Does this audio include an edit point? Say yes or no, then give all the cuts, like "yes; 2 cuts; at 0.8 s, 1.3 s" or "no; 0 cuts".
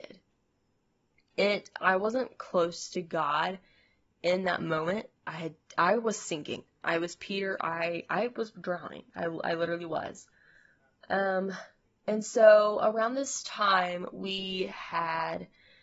no; 0 cuts